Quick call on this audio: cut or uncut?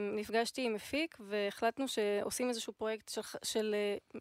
uncut